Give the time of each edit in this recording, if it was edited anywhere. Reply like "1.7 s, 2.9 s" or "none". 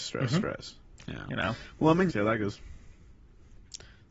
1.0 s, 2.1 s